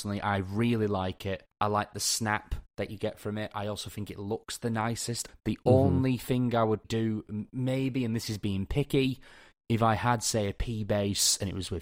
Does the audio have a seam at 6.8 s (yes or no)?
yes